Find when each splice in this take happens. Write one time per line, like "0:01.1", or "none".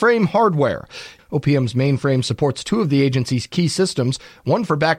0:01.2